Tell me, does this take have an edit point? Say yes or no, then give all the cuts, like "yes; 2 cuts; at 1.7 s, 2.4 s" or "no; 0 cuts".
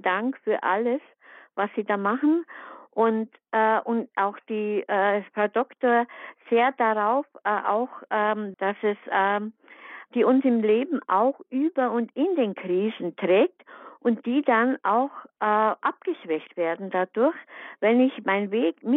yes; 2 cuts; at 8.5 s, 10.1 s